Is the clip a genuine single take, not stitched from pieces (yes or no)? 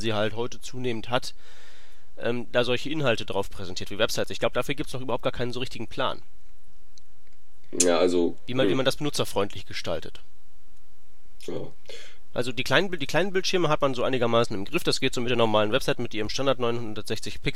yes